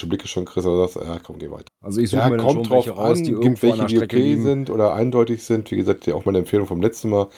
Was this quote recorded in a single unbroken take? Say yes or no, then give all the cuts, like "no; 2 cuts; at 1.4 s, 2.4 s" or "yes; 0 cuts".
no; 1 cut; at 1.7 s